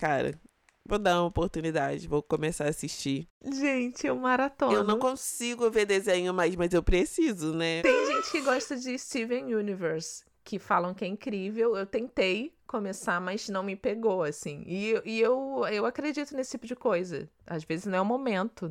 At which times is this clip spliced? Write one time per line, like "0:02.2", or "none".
0:07.8